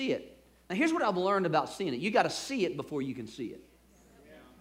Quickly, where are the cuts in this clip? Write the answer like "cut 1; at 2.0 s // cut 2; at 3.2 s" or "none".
none